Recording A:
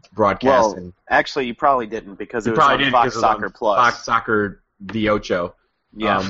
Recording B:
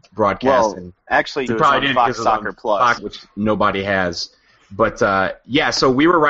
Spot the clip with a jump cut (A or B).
B